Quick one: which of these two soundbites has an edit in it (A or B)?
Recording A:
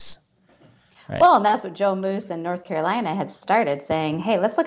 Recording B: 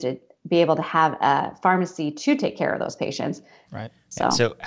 B